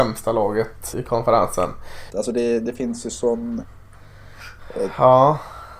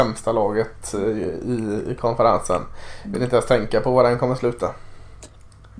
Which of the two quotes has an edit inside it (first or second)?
first